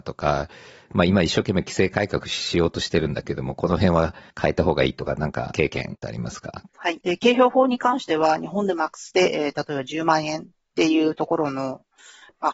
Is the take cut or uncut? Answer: cut